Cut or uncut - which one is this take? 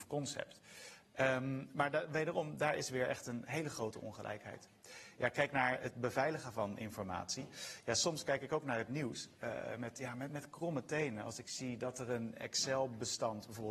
uncut